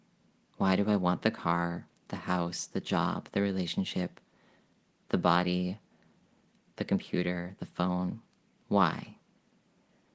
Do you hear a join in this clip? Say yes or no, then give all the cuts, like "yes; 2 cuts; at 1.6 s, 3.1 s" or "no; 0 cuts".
no; 0 cuts